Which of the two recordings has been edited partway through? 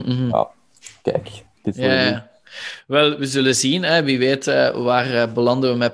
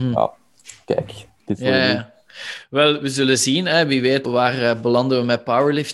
second; 1 cut; at 4.2 s

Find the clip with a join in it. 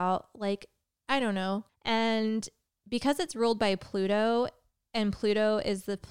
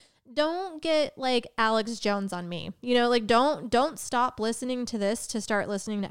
first; 1 cut; at 1.7 s

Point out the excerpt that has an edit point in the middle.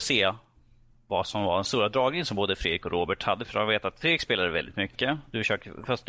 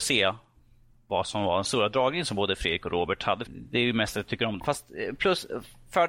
second; 2 cuts; at 3.5 s, 4.6 s

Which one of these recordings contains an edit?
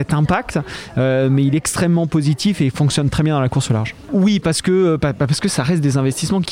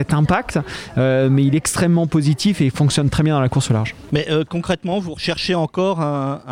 first; 1 cut; at 4.1 s

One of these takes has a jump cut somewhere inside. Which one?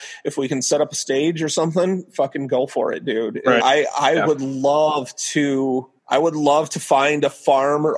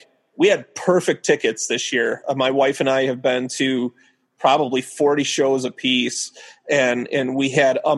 first; 2 cuts; at 3.6 s, 6.0 s

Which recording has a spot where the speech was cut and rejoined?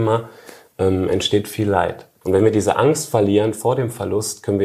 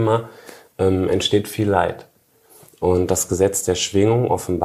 first; 1 cut; at 2.2 s

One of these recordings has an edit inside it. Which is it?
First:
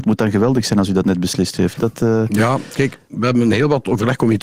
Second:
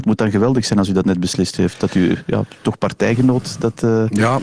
first; 1 cut; at 1.8 s

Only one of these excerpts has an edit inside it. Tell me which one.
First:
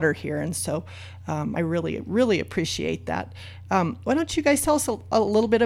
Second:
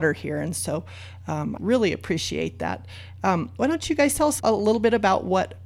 second; 2 cuts; at 1.6 s, 4.4 s

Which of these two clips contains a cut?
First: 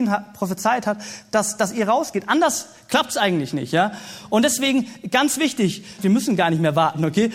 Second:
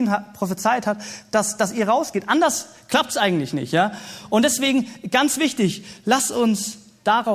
first; 1 cut; at 6.0 s

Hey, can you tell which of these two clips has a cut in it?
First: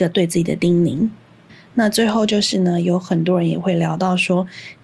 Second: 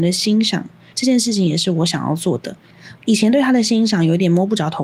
second; 2 cuts; at 0.9 s, 3.0 s

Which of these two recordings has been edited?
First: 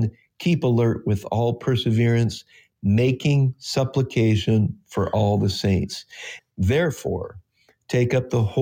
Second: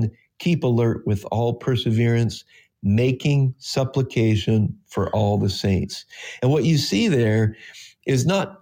first; 1 cut; at 6.4 s

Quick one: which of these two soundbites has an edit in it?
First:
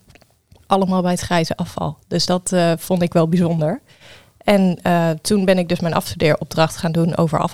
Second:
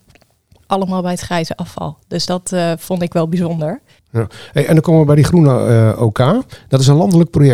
second; 1 cut; at 4.0 s

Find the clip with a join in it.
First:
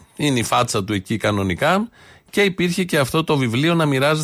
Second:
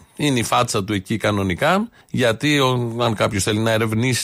second; 1 cut; at 2.0 s

